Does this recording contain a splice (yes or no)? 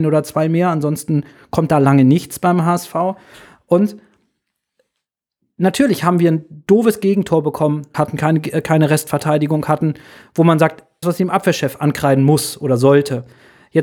yes